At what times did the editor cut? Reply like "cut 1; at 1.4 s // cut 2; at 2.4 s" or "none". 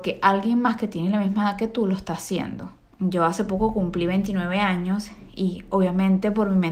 cut 1; at 2.9 s